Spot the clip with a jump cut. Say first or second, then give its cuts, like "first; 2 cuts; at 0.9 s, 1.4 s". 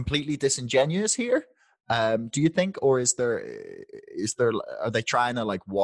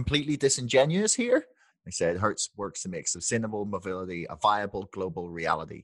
second; 1 cut; at 1.7 s